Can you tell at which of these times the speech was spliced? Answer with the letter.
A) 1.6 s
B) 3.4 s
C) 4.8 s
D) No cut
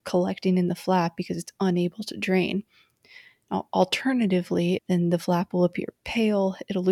C